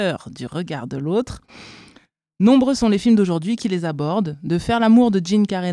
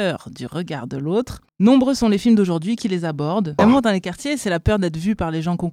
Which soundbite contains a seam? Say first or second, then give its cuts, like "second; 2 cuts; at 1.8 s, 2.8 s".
second; 2 cuts; at 1.5 s, 3.6 s